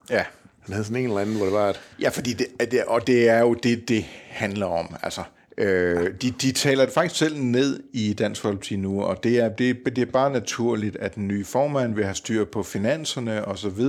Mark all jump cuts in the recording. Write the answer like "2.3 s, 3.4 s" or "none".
1.9 s